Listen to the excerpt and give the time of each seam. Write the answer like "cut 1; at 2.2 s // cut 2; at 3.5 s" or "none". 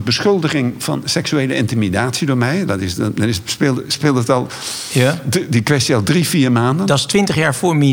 none